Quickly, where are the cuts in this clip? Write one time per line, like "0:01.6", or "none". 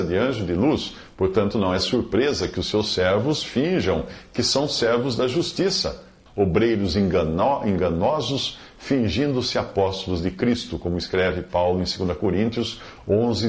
0:06.3